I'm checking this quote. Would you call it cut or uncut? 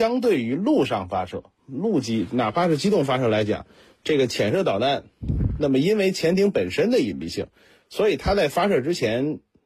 uncut